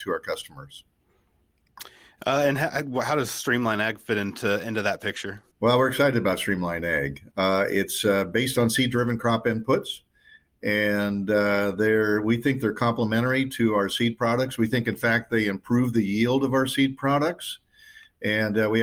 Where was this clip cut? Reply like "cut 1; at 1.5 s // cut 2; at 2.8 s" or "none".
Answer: cut 1; at 5.5 s // cut 2; at 7.3 s